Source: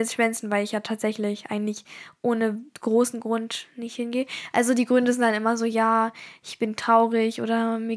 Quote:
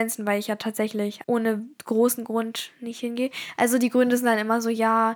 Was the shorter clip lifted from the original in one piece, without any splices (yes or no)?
no